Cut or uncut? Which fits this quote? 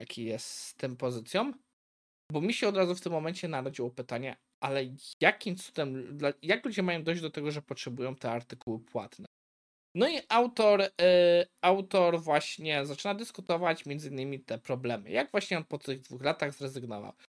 uncut